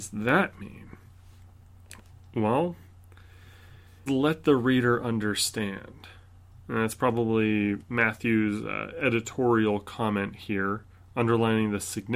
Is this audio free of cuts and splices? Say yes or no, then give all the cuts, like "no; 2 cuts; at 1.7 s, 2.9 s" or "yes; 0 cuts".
no; 1 cut; at 4.1 s